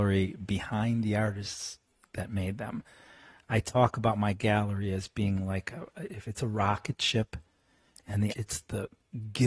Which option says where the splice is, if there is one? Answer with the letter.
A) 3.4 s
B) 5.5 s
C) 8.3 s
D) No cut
C